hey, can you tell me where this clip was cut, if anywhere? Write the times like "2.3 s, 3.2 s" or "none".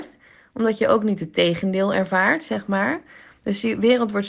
none